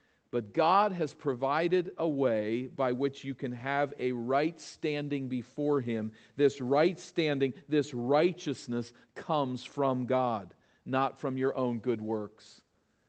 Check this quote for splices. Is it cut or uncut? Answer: uncut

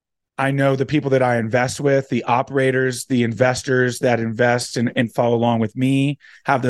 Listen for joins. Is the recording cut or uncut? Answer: uncut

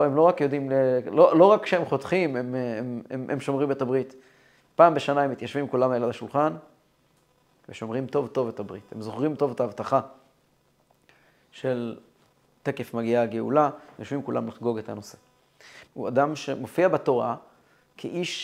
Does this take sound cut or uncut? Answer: cut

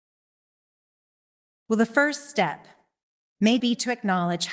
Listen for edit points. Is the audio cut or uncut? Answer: cut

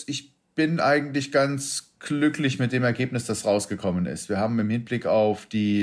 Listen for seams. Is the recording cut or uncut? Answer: uncut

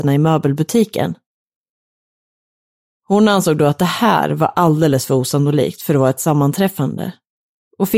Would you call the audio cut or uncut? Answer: uncut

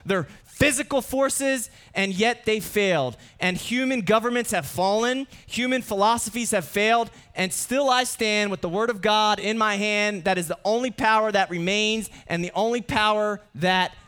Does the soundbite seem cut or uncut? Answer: uncut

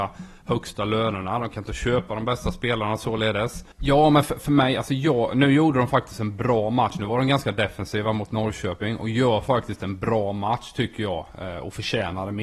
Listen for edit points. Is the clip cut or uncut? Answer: cut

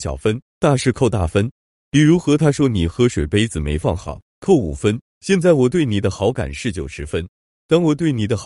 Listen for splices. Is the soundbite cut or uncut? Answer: uncut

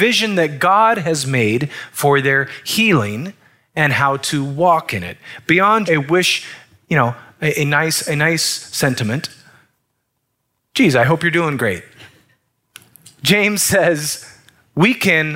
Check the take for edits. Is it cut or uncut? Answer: cut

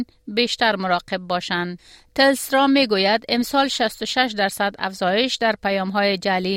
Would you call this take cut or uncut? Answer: uncut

